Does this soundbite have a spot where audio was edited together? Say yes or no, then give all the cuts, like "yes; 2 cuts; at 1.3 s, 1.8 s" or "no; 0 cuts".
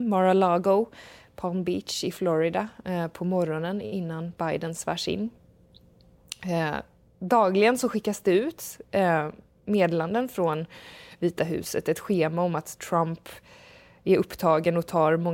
no; 0 cuts